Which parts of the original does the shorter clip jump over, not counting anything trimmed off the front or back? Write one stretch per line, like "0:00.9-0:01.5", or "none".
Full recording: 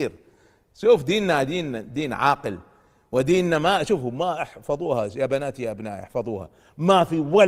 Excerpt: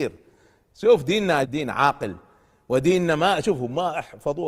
0:01.4-0:01.9